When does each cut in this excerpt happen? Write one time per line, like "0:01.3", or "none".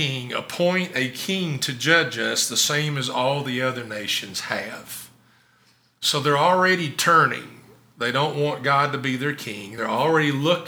none